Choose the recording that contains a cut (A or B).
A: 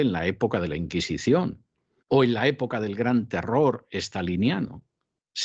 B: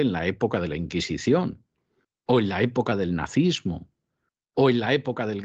A